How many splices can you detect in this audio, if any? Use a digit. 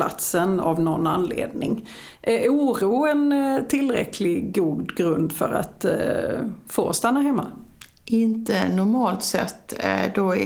0